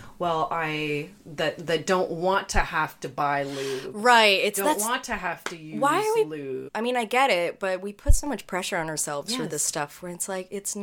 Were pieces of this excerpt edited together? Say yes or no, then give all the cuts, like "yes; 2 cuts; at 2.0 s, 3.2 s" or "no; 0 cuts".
yes; 1 cut; at 6.7 s